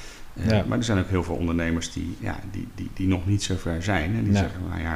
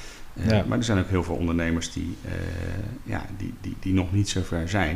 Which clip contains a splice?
first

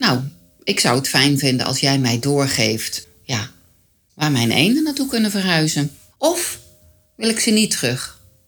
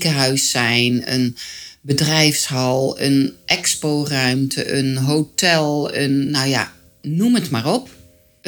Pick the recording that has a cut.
first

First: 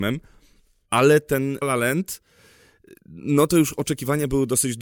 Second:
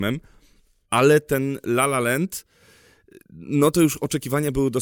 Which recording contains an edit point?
first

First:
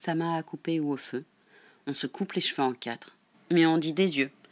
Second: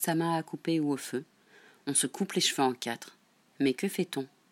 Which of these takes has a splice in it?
first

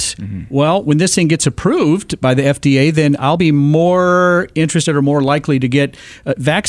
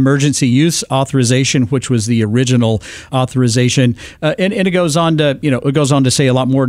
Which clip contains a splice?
second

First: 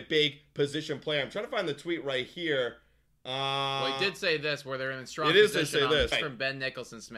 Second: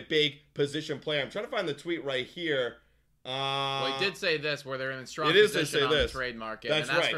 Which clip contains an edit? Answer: first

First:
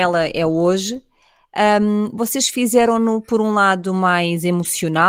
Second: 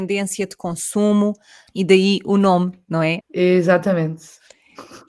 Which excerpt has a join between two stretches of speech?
second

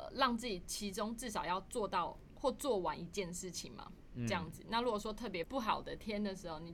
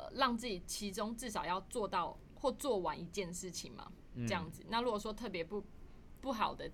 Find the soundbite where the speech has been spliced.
first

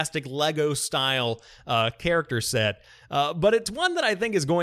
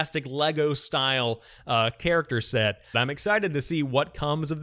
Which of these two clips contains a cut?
second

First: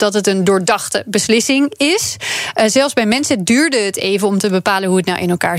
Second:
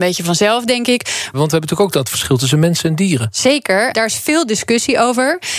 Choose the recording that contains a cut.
second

